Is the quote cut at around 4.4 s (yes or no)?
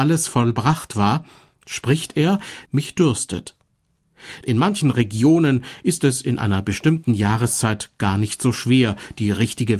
yes